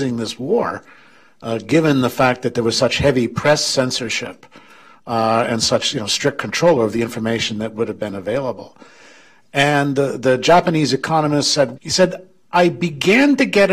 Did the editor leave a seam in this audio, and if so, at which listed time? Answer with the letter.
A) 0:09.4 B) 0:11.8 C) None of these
B